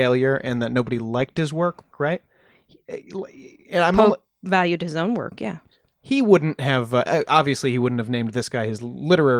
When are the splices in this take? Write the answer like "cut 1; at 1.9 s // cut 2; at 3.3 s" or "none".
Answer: cut 1; at 1.9 s